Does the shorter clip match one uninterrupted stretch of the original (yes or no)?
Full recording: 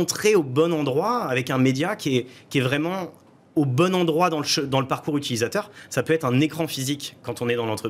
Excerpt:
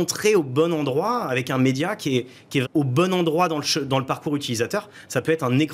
no